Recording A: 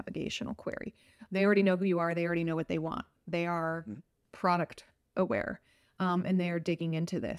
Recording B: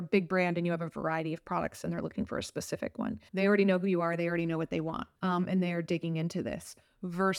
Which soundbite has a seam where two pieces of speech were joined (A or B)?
B